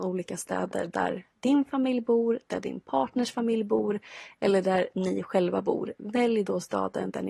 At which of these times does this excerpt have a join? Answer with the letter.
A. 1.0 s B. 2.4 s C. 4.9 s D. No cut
D